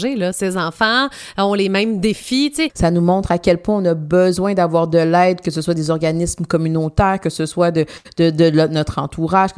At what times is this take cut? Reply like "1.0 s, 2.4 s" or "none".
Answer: 2.7 s